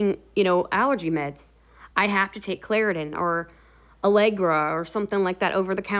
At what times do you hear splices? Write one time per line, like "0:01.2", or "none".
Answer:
none